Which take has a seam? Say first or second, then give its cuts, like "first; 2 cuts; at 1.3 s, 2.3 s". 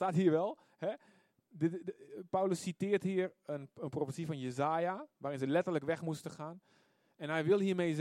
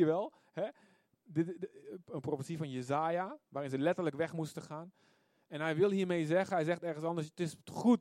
second; 1 cut; at 2.0 s